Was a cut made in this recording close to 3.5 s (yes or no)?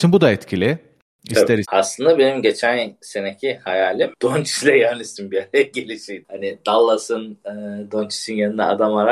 no